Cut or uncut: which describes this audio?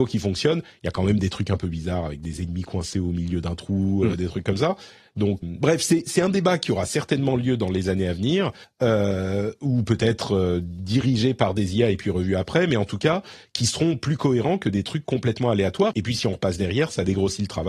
cut